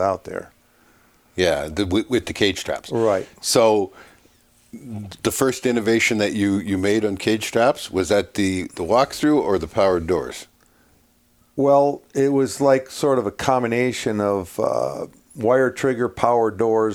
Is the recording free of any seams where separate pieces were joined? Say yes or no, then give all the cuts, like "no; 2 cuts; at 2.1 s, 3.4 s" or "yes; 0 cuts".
yes; 0 cuts